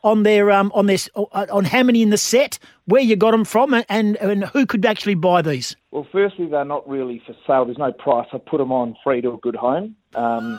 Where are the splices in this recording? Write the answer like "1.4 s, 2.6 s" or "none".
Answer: 5.8 s